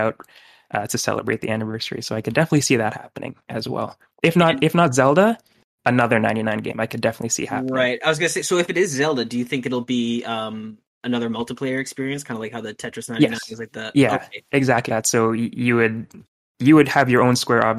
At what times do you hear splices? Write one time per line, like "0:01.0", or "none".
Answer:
0:14.9